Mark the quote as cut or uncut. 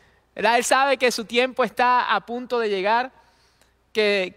uncut